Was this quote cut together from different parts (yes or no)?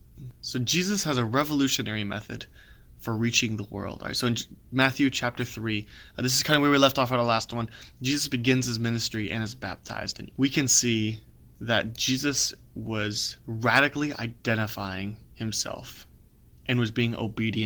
yes